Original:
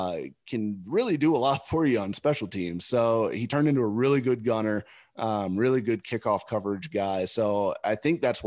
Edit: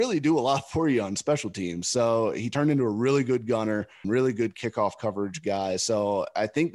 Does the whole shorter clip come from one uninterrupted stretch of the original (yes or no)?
no